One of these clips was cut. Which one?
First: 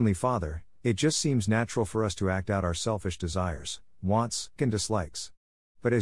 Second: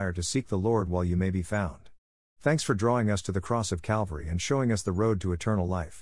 first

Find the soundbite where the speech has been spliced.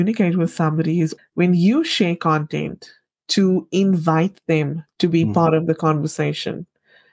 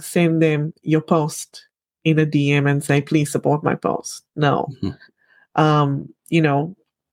first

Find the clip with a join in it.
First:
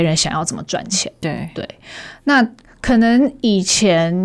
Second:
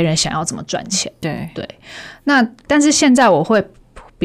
second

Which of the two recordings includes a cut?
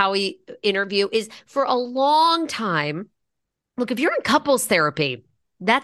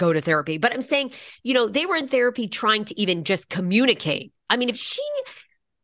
second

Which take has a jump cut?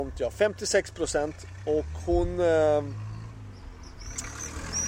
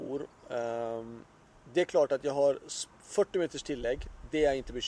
second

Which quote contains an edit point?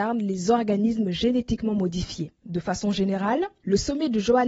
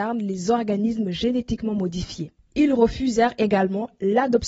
first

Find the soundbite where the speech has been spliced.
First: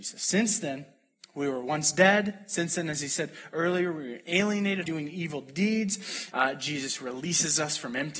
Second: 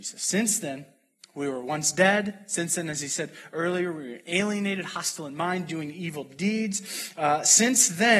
first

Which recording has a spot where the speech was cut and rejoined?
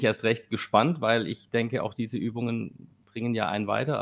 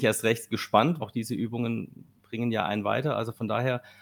second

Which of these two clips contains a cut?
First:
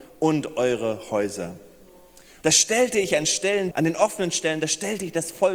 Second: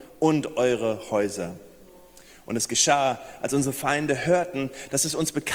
first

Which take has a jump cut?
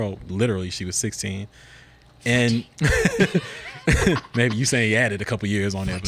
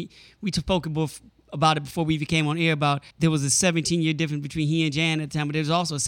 second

